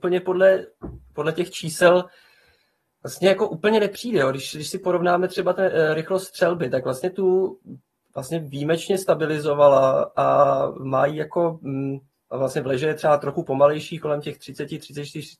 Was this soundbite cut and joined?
no; 0 cuts

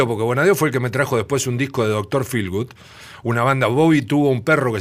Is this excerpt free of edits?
yes; 0 cuts

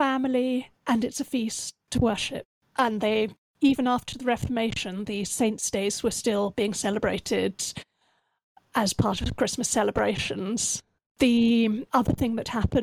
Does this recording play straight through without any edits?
yes; 0 cuts

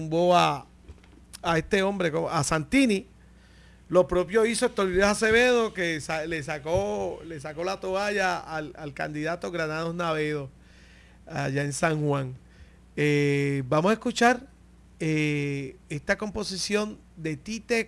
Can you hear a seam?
no; 0 cuts

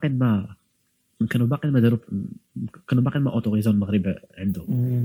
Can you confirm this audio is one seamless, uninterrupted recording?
yes; 0 cuts

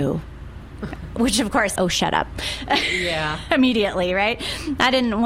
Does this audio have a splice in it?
yes; 1 cut; at 1.8 s

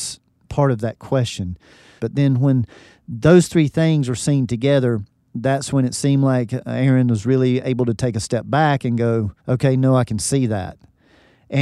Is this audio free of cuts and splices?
no; 2 cuts; at 2.0 s, 9.4 s

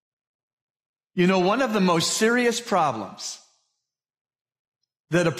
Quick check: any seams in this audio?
yes; 1 cut; at 1.0 s

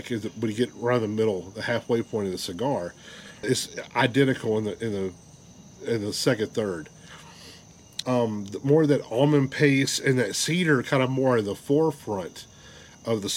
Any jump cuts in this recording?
yes; 2 cuts; at 3.4 s, 8.0 s

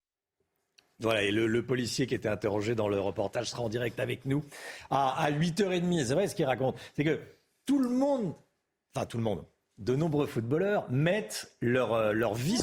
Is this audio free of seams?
yes; 0 cuts

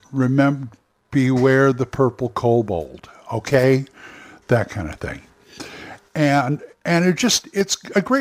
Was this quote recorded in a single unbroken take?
yes; 0 cuts

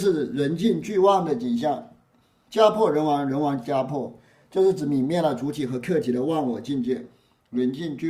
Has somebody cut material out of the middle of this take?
no; 0 cuts

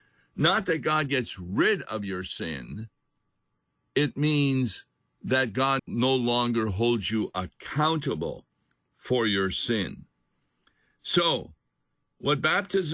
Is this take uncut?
no; 1 cut; at 5.8 s

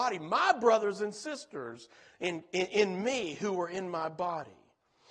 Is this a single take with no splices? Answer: yes; 0 cuts

